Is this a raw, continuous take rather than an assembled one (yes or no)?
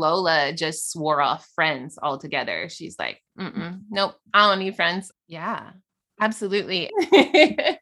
no